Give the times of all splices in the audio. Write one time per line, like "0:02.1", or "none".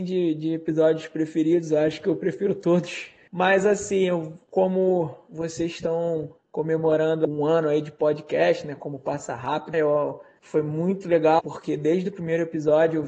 0:09.7
0:11.4